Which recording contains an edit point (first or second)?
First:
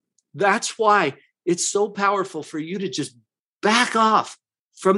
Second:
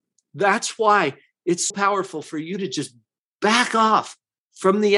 second